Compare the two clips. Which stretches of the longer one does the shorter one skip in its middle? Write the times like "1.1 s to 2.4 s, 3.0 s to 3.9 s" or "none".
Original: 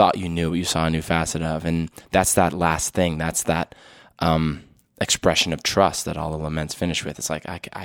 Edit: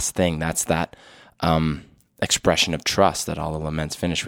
none